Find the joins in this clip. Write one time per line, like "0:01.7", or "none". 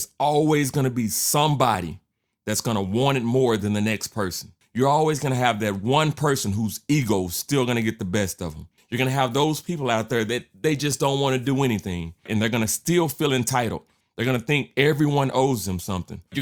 none